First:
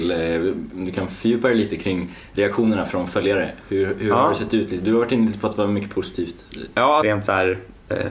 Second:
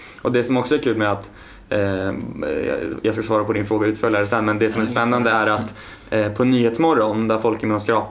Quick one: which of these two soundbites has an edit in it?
first; 1 cut; at 7.0 s

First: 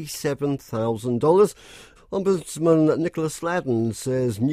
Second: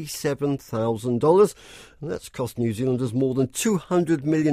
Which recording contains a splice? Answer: first; 1 cut; at 2.0 s

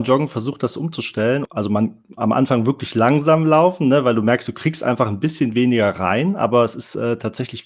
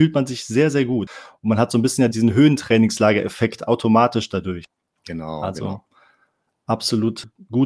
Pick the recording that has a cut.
second; 1 cut; at 2.1 s

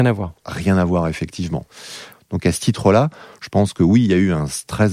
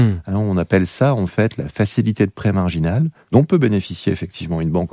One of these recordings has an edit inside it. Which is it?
first; 1 cut; at 2.1 s

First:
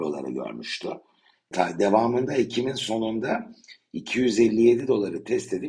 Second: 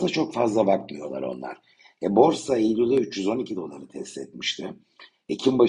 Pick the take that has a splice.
first; 1 cut; at 1.5 s

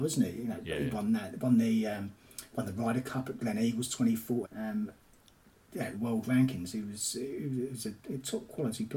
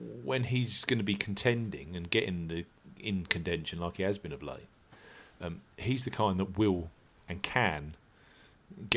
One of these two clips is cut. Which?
first; 2 cuts; at 4.4 s, 5.9 s

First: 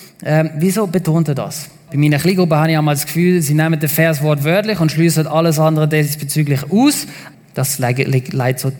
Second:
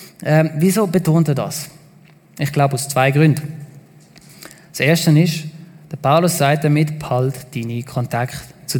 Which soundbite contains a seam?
first; 2 cuts; at 1.9 s, 7.3 s

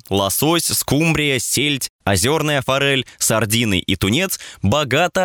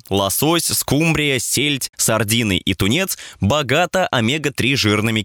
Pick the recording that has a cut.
second; 1 cut; at 1.9 s

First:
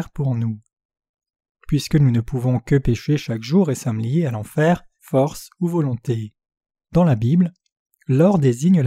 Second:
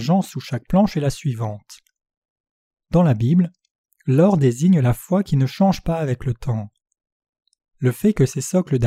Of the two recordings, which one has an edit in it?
first; 2 cuts; at 5.0 s, 6.8 s

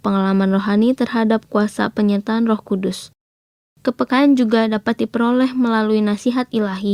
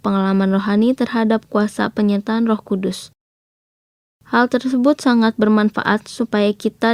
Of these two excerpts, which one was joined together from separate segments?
first; 1 cut; at 3.7 s

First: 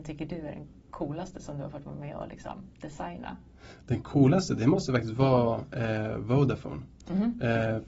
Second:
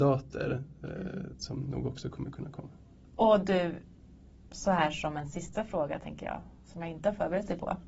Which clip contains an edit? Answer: second; 1 cut; at 3.0 s

